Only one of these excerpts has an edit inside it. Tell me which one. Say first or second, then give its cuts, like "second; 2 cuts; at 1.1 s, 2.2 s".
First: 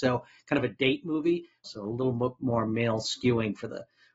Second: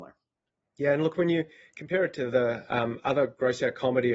first; 1 cut; at 1.6 s